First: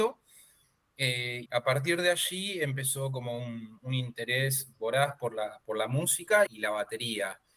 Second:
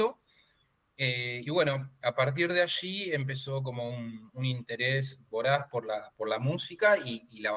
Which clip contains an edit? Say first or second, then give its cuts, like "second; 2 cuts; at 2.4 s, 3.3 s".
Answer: first; 2 cuts; at 1.5 s, 6.5 s